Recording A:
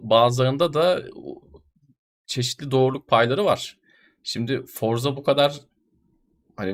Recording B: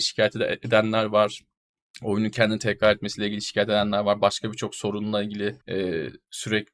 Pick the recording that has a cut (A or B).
B